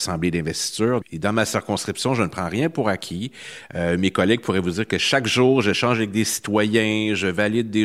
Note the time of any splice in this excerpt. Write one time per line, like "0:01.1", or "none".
0:01.0